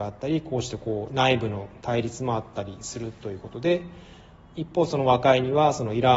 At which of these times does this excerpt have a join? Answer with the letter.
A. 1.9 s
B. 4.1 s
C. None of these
C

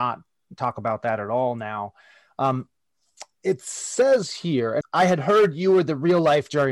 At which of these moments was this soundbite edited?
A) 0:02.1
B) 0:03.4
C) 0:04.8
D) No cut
C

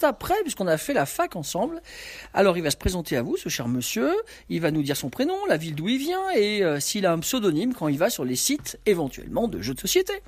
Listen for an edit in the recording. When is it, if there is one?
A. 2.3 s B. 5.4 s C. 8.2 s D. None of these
D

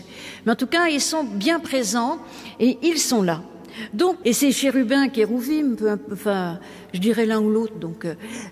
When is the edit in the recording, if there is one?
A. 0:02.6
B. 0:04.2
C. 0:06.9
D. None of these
B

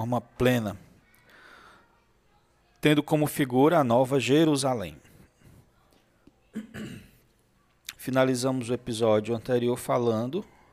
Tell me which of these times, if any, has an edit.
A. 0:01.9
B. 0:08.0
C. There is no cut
B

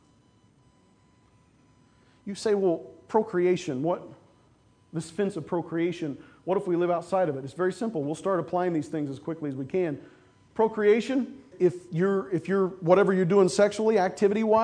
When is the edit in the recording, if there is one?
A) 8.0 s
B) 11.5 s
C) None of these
B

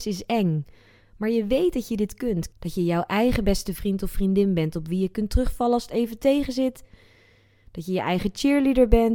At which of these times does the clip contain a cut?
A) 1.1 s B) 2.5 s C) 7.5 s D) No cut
B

